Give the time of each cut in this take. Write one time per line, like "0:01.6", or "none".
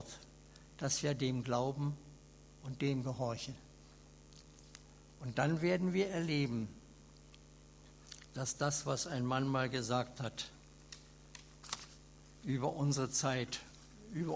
none